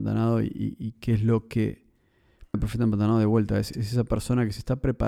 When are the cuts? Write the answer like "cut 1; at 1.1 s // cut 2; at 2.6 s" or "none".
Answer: cut 1; at 2.5 s // cut 2; at 3.7 s

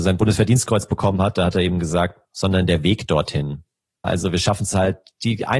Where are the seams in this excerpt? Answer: cut 1; at 2.2 s // cut 2; at 4.0 s

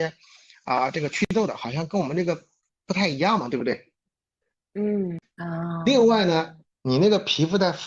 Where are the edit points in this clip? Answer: cut 1; at 5.2 s // cut 2; at 6.6 s

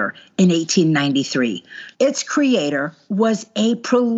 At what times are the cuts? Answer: cut 1; at 1.9 s

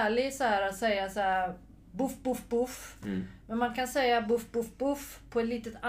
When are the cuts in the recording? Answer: none

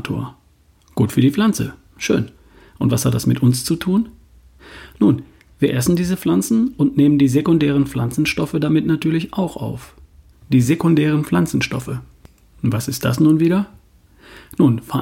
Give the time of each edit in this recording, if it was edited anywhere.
cut 1; at 10.3 s

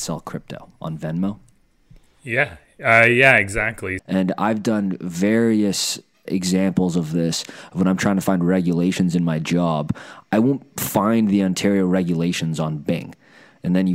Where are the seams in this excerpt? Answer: cut 1; at 4.0 s // cut 2; at 6.3 s

